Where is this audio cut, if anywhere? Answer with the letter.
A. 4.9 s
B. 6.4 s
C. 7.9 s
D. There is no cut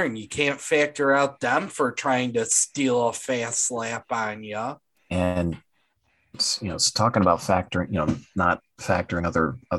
A